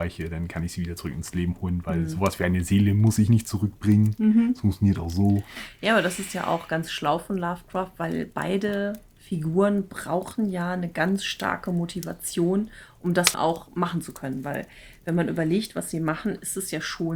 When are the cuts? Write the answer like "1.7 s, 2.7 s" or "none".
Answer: 13.3 s